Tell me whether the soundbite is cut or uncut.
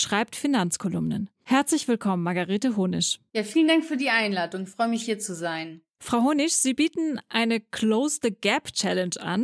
uncut